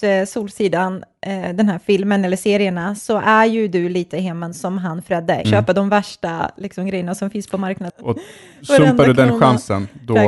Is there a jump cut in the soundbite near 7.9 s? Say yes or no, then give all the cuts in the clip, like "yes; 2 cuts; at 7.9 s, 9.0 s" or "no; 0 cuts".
yes; 2 cuts; at 5.4 s, 7.9 s